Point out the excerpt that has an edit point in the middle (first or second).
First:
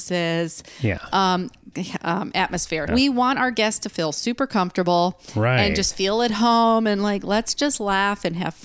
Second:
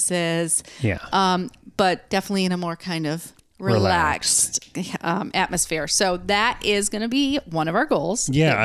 first